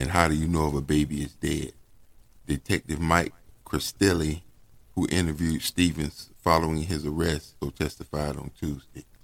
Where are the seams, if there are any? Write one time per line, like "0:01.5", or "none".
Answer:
0:07.6